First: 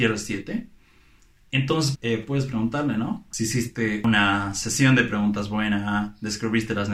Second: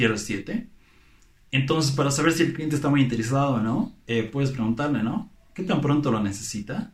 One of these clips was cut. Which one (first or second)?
first